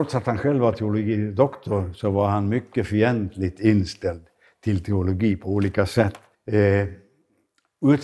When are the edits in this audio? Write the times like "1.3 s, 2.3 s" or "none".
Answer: 6.3 s